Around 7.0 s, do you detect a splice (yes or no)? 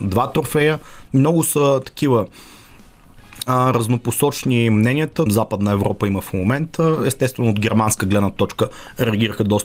no